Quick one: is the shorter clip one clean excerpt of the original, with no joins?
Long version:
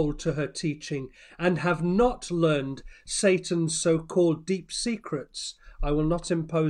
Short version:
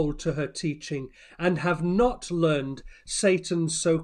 yes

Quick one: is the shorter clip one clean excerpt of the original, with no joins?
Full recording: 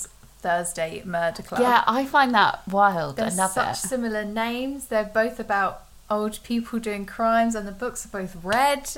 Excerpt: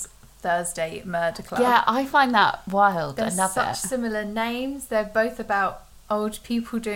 yes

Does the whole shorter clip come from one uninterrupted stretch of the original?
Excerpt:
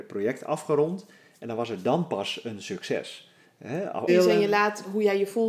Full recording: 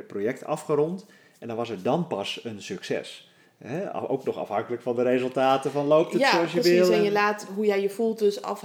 no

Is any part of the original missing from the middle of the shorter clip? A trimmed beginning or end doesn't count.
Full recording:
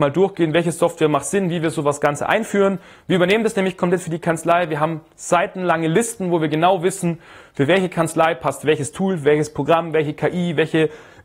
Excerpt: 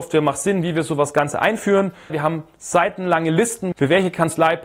yes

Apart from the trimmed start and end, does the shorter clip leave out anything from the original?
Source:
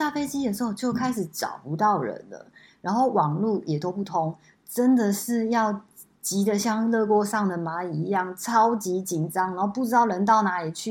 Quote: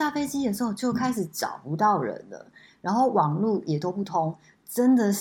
no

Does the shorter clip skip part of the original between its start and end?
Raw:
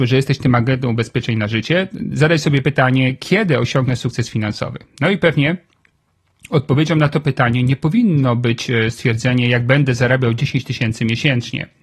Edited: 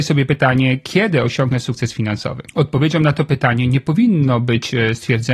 yes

